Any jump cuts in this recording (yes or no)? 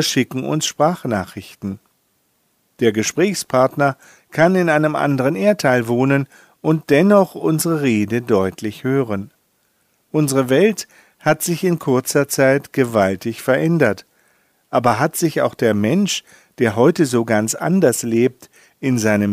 no